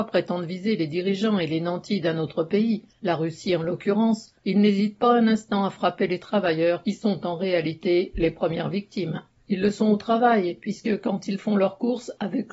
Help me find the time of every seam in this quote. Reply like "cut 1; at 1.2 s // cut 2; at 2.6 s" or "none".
cut 1; at 9.4 s